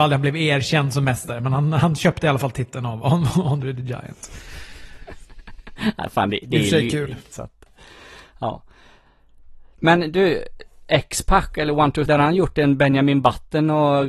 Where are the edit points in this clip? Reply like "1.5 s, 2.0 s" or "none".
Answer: 7.3 s, 12.1 s